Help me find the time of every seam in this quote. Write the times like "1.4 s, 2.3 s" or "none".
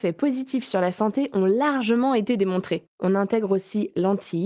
2.9 s